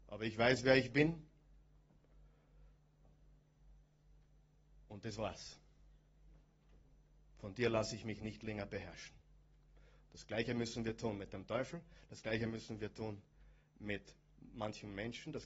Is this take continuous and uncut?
yes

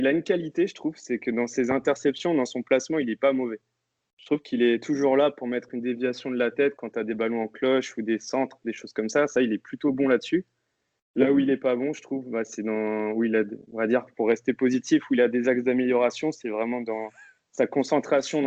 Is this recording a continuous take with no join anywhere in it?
yes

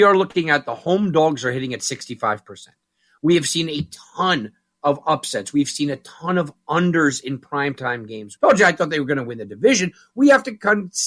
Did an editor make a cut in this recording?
yes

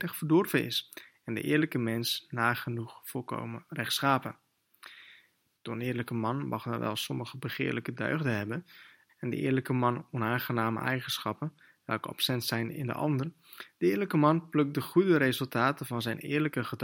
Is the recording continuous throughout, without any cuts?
no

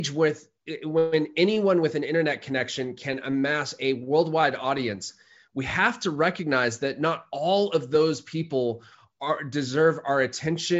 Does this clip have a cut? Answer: no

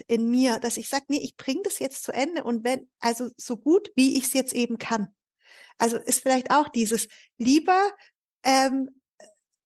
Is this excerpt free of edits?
yes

